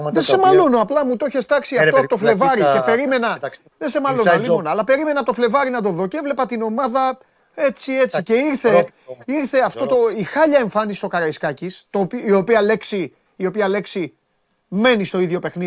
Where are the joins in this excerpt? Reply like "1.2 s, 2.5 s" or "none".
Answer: 3.7 s